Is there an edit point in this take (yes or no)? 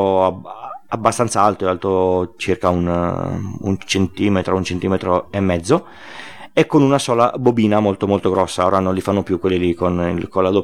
no